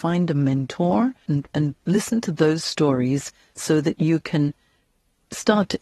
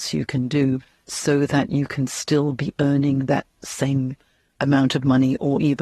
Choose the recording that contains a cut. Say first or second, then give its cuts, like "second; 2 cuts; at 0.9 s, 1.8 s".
first; 1 cut; at 1.3 s